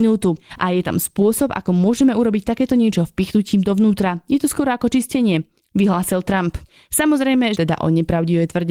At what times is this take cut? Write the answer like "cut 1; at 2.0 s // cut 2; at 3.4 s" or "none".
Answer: cut 1; at 7.5 s